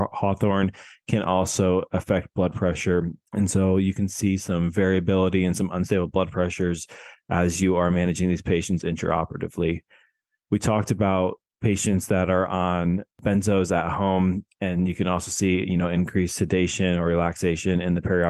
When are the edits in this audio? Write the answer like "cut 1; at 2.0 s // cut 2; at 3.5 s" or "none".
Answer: none